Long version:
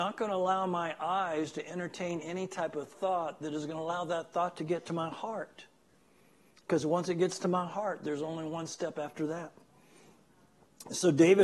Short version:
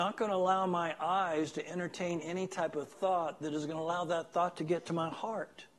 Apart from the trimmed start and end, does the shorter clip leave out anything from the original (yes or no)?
no